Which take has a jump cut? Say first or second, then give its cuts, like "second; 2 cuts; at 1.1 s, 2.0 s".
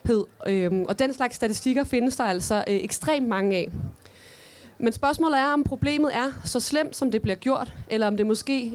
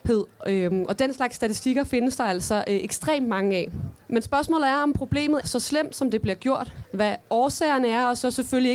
second; 3 cuts; at 4.0 s, 5.4 s, 6.8 s